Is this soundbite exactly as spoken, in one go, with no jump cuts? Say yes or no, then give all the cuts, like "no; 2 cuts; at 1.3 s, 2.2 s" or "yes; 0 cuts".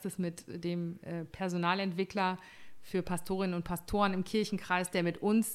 yes; 0 cuts